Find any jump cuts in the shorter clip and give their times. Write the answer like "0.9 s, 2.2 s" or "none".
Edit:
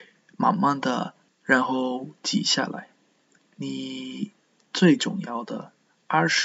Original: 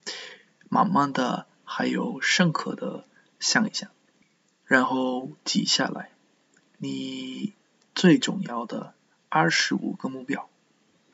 1.3 s